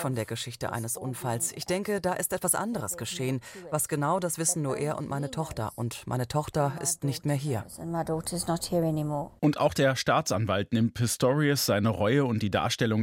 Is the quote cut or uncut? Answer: uncut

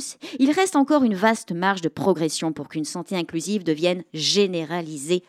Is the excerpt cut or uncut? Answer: uncut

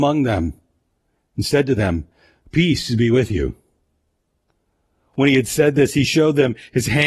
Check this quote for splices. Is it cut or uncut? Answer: uncut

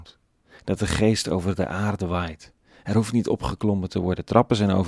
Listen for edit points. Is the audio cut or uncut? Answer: uncut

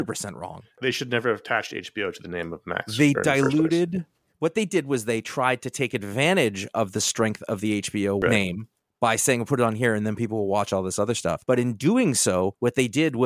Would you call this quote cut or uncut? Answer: uncut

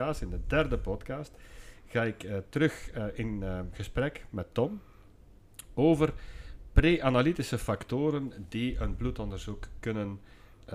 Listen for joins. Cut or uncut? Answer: uncut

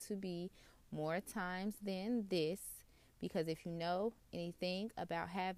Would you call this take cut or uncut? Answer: uncut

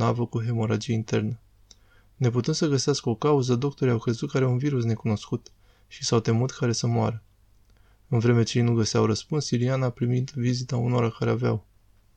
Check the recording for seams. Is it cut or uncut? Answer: uncut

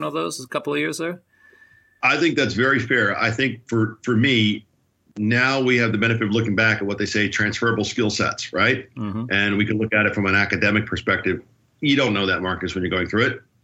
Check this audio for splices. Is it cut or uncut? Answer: uncut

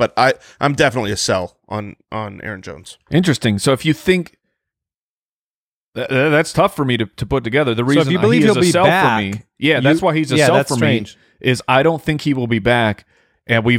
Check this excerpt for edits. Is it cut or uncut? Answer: uncut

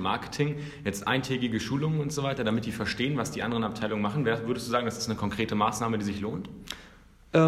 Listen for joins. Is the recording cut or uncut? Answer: uncut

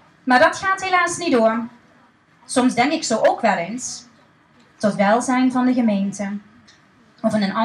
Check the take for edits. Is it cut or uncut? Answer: cut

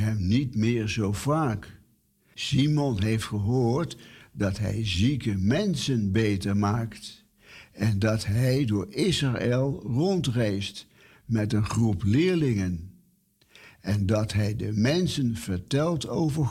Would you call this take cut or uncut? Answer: cut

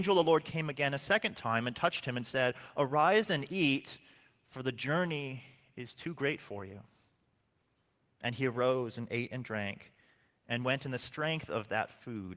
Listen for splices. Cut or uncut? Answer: uncut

